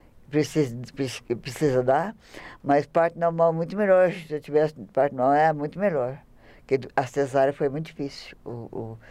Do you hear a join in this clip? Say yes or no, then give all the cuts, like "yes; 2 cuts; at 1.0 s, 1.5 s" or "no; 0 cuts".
no; 0 cuts